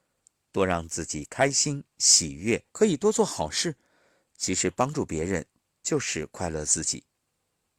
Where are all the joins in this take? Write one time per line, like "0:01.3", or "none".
0:02.7